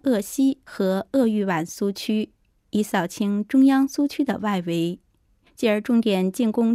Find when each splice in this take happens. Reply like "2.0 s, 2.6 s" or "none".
none

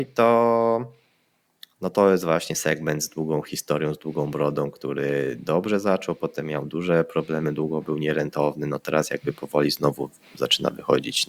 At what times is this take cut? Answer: none

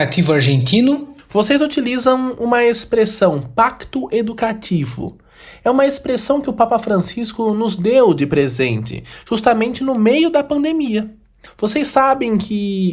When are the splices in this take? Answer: 11.5 s

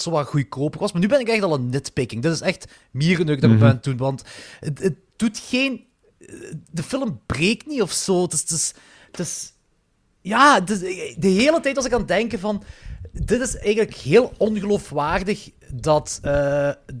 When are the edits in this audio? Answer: none

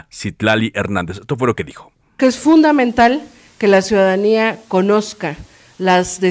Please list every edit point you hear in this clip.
none

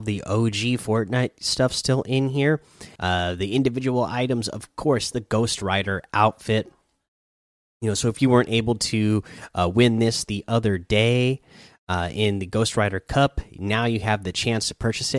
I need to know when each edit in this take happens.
3.0 s

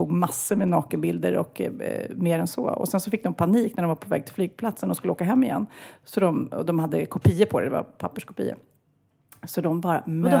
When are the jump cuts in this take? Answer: none

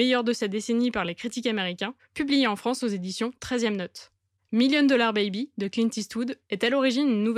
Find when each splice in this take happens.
2.0 s

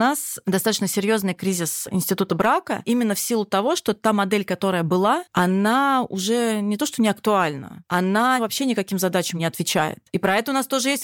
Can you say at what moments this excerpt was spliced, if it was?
5.3 s

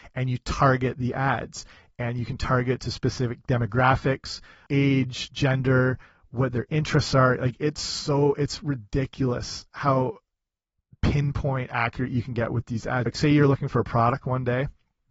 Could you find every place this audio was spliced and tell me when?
4.7 s, 13.1 s

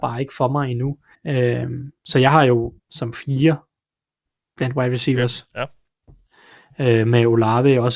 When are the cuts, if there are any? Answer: 1.1 s, 2.8 s

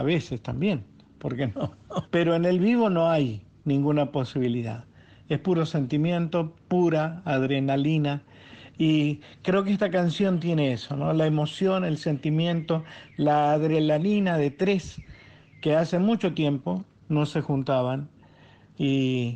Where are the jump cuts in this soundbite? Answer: 2.0 s

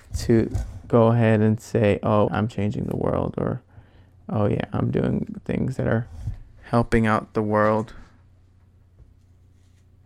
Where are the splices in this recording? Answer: 2.3 s

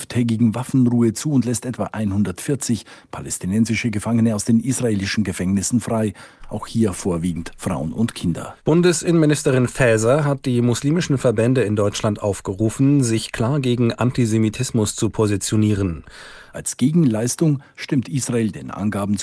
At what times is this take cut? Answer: 8.6 s, 16.5 s

